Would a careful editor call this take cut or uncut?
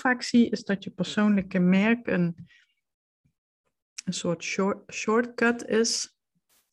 uncut